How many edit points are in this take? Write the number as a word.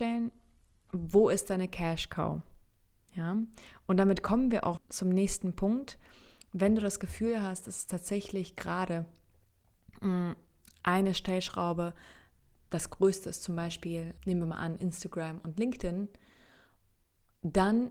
two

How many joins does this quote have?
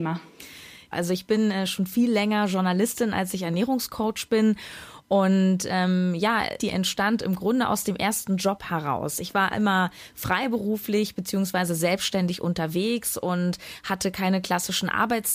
two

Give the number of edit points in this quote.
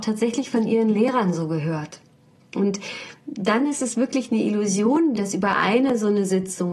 two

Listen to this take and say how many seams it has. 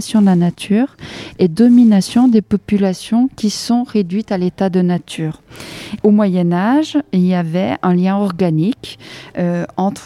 one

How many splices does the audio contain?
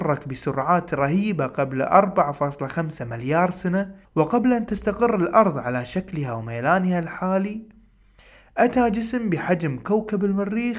one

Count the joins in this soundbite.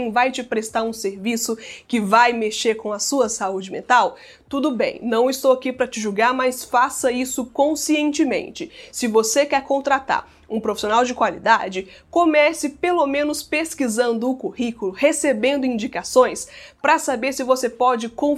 zero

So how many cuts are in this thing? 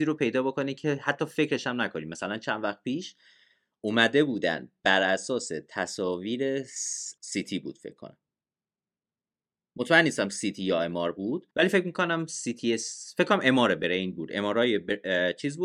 two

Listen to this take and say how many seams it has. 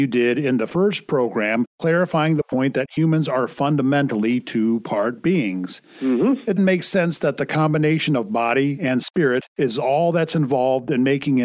one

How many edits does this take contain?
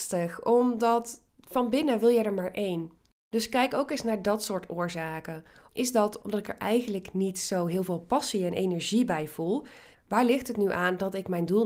two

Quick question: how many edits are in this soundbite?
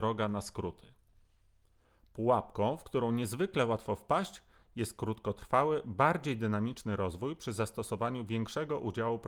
zero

